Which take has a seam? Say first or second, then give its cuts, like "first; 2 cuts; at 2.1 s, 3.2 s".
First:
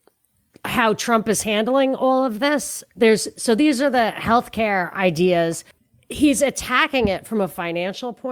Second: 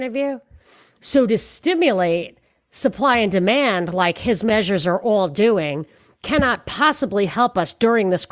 second; 1 cut; at 0.9 s